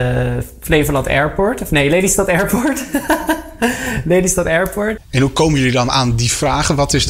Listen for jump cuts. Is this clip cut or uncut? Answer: cut